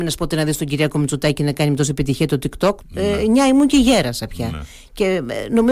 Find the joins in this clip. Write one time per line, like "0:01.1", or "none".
0:02.8